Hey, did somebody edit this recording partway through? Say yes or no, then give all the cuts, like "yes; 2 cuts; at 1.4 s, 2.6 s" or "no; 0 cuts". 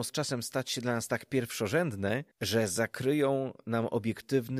yes; 1 cut; at 2.3 s